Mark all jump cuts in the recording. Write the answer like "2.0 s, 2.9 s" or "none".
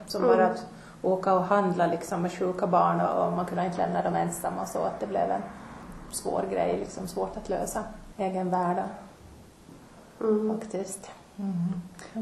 8.1 s